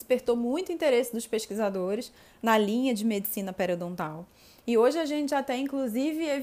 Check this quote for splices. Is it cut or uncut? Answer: uncut